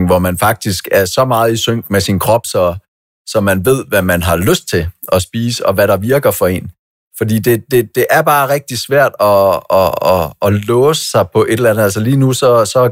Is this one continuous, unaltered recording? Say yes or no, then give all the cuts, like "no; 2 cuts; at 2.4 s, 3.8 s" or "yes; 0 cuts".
yes; 0 cuts